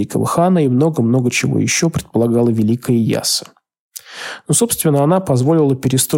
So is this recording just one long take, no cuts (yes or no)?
yes